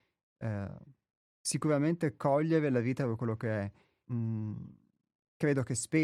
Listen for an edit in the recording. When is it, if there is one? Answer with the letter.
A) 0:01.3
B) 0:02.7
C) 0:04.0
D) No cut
C